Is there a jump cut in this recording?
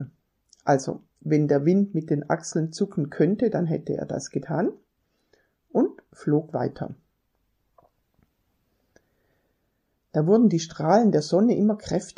no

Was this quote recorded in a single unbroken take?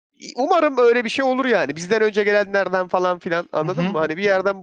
yes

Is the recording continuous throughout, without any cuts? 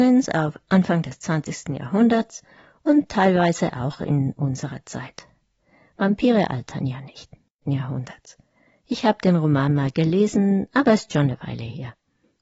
no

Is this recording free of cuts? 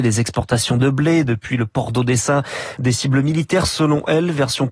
no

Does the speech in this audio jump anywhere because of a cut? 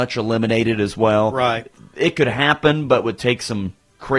no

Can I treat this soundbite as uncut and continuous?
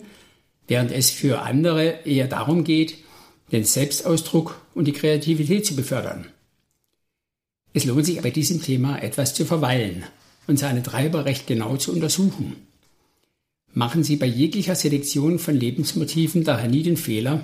no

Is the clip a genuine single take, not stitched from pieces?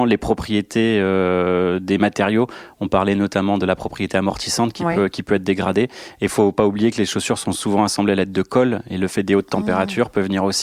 yes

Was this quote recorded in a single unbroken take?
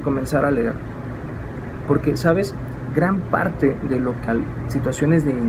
no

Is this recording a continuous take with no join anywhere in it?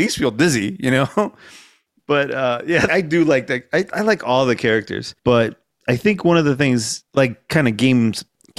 no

